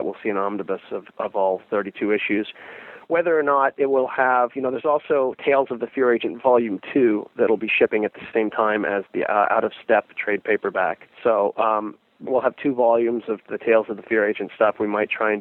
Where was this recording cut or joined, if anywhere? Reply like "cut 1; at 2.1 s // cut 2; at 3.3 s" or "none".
cut 1; at 11.1 s // cut 2; at 12.3 s

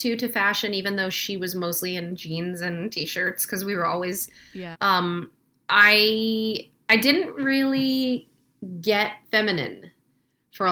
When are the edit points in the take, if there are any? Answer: cut 1; at 4.7 s // cut 2; at 9.2 s

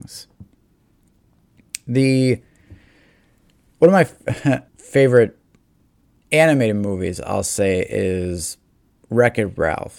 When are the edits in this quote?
cut 1; at 4.7 s

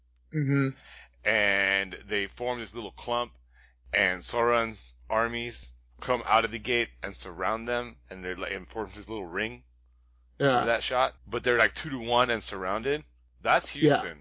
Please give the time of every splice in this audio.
cut 1; at 11.2 s

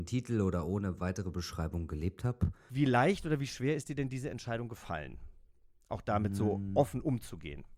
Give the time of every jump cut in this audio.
cut 1; at 2.7 s

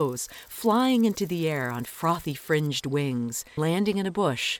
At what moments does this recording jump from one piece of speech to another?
cut 1; at 3.6 s

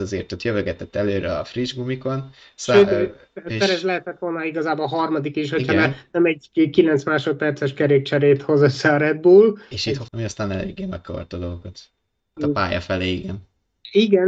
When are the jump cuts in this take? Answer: cut 1; at 10.1 s // cut 2; at 12.4 s

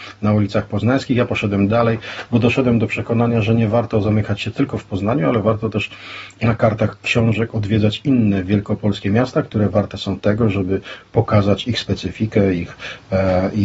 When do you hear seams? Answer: none

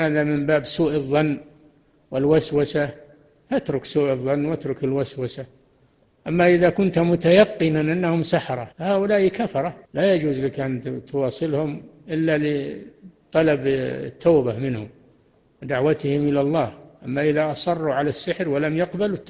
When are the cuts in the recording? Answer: cut 1; at 8.7 s // cut 2; at 9.8 s

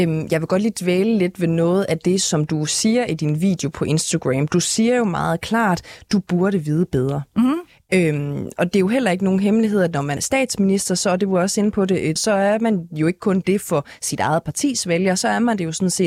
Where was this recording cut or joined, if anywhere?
cut 1; at 10.2 s // cut 2; at 12.2 s

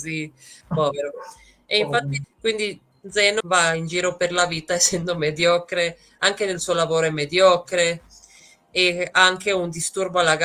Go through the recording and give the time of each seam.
cut 1; at 2.2 s // cut 2; at 3.4 s

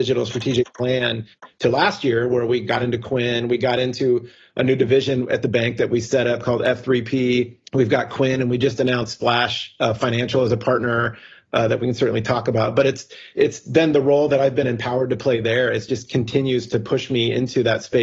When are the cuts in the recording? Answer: cut 1; at 7.6 s

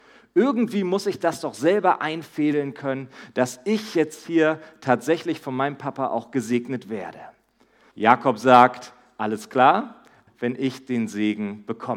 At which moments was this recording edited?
cut 1; at 7.9 s // cut 2; at 10.3 s

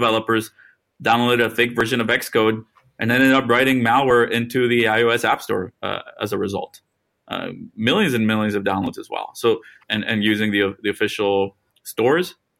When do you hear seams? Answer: cut 1; at 9.8 s

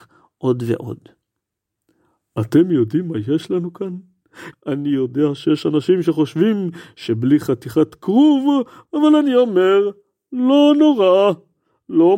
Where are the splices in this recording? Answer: cut 1; at 4.5 s // cut 2; at 8.9 s

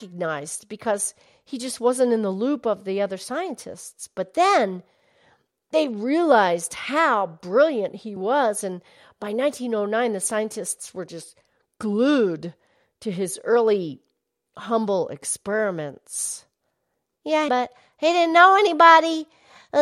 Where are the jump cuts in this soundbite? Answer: cut 1; at 8.2 s // cut 2; at 17.5 s

